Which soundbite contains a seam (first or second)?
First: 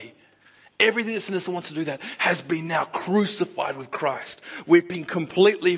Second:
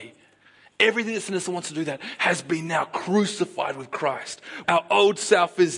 second